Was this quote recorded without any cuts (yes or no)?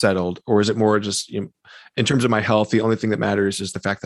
yes